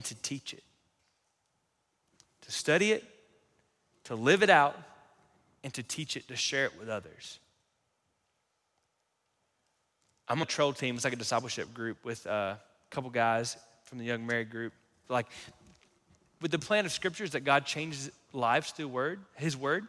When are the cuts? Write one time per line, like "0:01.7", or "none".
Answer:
0:10.4
0:15.0